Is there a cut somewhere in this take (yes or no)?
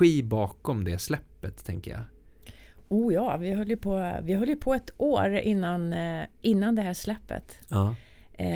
no